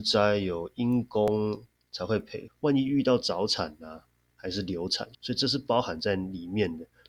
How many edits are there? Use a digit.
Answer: 2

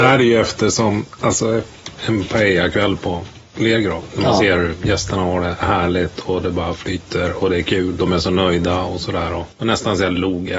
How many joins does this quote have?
1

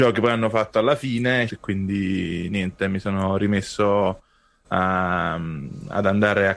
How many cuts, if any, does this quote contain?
1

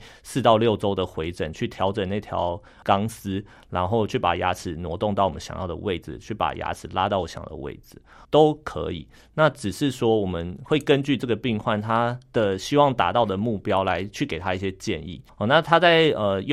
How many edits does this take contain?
2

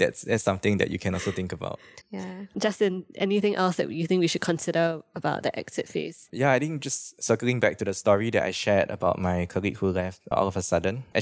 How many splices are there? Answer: 1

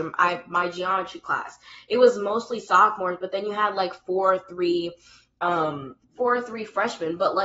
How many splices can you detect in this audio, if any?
1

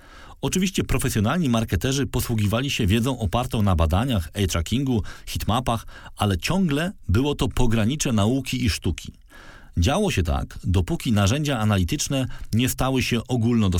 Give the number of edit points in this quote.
0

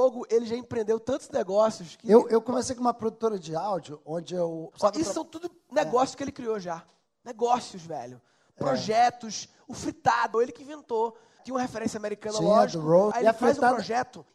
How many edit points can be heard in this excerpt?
2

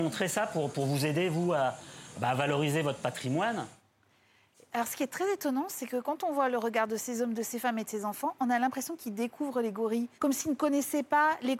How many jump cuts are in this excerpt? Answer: 1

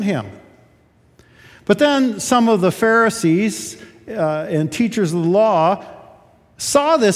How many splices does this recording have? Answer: 0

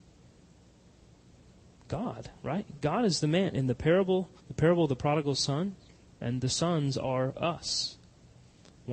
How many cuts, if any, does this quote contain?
2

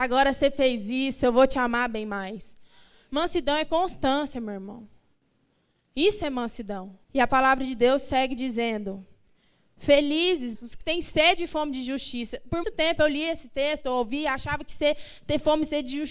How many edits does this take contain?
3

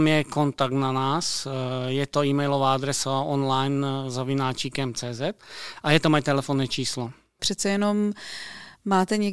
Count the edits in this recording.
1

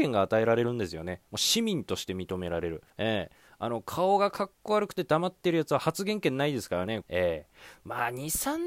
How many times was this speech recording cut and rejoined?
2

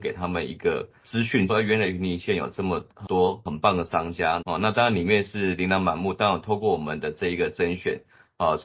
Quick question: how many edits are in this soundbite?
3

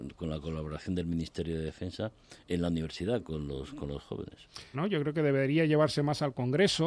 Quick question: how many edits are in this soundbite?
1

